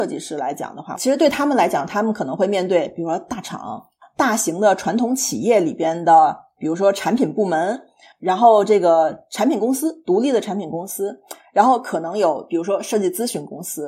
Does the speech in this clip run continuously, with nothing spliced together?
yes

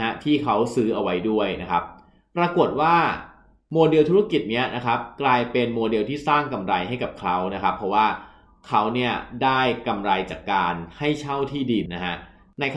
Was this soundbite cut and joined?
yes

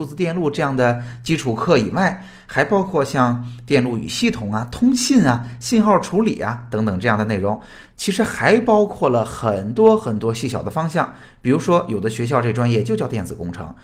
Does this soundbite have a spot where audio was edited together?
yes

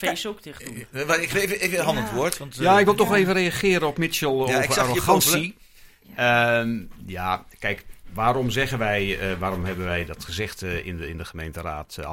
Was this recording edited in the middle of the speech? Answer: no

